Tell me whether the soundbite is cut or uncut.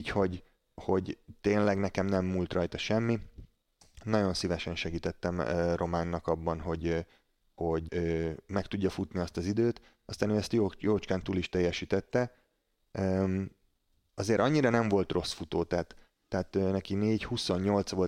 cut